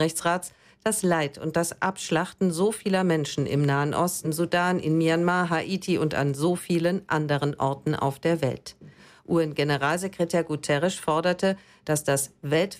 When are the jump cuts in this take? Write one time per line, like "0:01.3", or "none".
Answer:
0:04.2